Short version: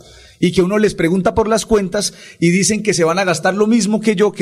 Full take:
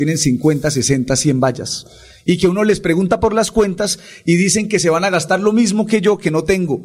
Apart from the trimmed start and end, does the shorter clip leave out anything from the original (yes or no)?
no